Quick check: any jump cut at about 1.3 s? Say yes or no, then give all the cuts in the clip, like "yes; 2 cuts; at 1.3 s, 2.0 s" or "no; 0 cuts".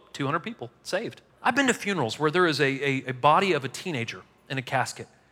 yes; 1 cut; at 1.3 s